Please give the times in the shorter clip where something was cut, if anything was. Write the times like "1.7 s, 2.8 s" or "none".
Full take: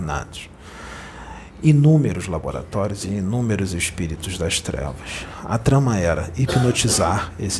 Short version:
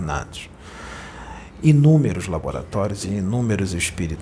none